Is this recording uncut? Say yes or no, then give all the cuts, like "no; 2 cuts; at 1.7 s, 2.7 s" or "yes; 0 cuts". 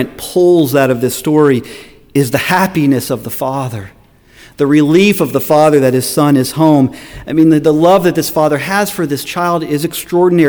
yes; 0 cuts